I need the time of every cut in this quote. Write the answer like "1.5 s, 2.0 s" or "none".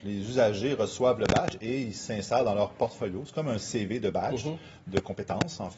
none